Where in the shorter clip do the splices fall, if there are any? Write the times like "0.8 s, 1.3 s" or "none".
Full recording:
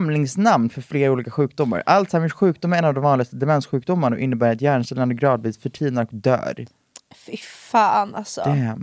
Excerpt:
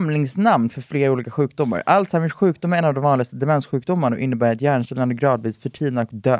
none